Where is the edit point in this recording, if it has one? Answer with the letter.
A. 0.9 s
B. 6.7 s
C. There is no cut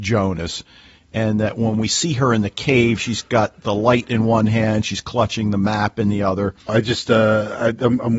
B